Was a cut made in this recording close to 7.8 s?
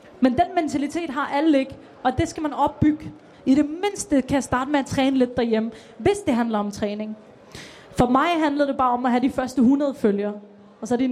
no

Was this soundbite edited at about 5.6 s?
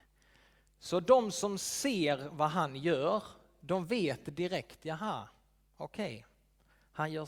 no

